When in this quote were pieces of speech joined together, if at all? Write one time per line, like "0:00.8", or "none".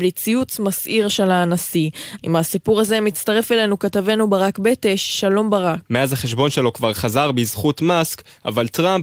0:02.2
0:05.8

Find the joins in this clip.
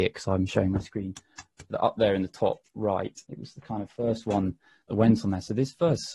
0:01.7
0:03.2

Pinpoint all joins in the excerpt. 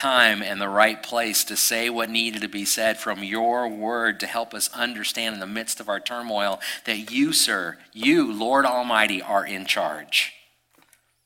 none

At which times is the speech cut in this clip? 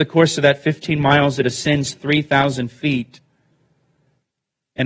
none

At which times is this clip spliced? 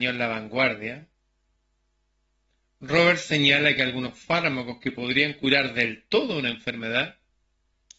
none

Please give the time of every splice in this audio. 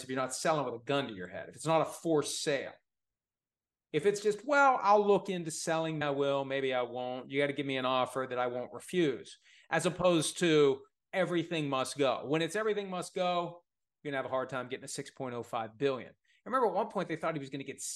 0:06.0

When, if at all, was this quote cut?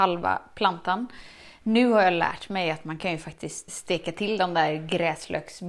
0:03.7

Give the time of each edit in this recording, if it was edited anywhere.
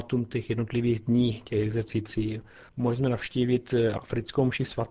0:02.7

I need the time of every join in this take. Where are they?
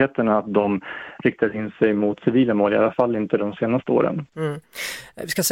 none

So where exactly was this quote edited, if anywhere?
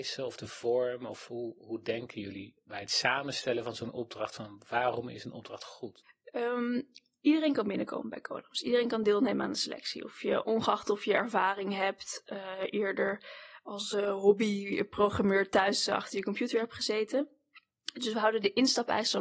none

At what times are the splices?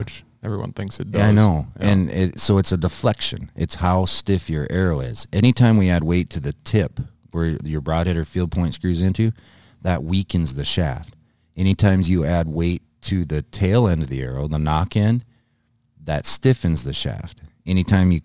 none

